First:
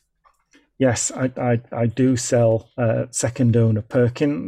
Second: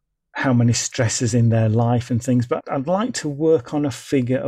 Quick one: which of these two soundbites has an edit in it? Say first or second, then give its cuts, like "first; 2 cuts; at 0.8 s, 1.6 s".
second; 1 cut; at 2.6 s